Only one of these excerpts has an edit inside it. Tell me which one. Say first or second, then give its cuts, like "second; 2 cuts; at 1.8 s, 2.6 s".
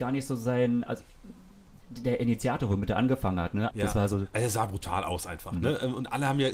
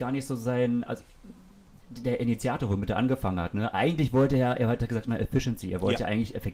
first; 1 cut; at 3.7 s